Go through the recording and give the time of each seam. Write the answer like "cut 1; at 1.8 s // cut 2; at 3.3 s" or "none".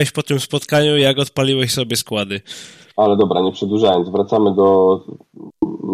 cut 1; at 2.9 s